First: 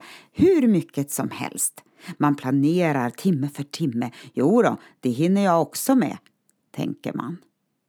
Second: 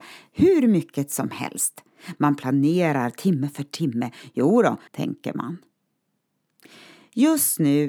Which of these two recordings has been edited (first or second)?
second